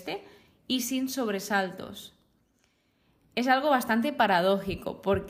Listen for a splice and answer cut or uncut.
uncut